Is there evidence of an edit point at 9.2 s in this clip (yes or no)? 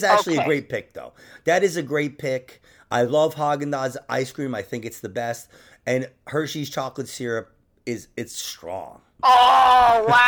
yes